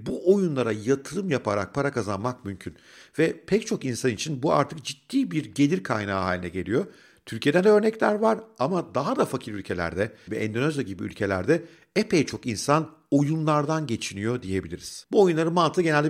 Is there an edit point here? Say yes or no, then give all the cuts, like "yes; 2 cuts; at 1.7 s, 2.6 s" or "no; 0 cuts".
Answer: yes; 1 cut; at 10.3 s